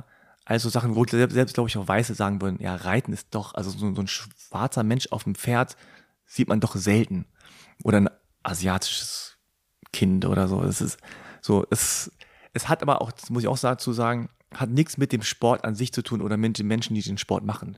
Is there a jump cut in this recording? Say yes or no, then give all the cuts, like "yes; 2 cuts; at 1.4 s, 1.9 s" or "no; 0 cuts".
no; 0 cuts